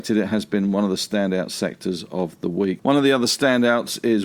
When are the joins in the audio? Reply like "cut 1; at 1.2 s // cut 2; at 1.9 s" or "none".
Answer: cut 1; at 2.8 s